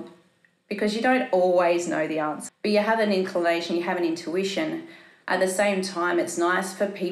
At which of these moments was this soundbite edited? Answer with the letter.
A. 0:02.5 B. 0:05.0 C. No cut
A